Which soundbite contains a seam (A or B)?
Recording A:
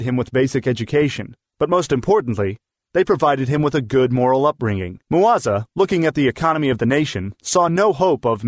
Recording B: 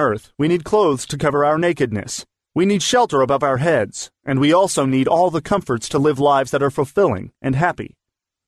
A